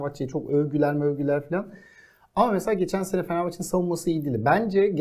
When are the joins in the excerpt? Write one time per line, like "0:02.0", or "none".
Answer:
none